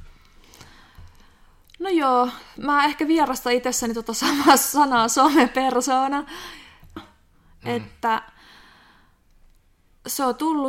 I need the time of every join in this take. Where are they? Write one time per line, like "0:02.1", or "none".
0:07.0